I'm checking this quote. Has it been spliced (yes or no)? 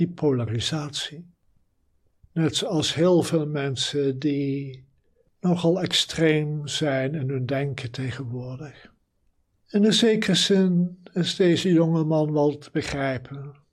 yes